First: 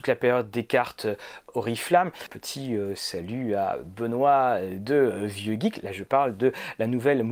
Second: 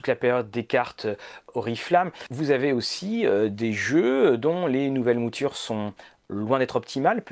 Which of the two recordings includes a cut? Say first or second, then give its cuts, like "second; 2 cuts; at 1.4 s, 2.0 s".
first; 1 cut; at 2.3 s